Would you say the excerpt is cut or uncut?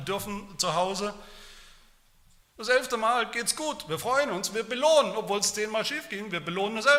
cut